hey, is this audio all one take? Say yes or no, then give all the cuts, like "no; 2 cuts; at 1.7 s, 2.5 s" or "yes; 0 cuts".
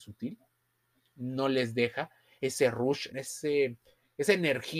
no; 1 cut; at 3.1 s